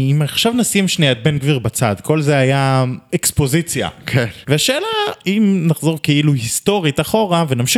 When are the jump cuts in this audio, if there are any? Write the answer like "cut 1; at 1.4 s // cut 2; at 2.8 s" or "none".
cut 1; at 4.4 s